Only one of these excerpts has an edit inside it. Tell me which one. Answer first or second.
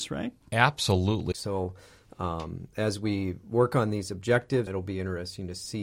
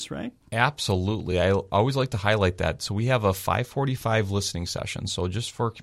first